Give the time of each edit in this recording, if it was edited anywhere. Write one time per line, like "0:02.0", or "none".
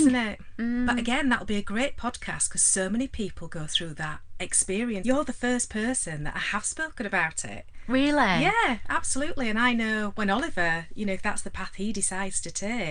0:05.0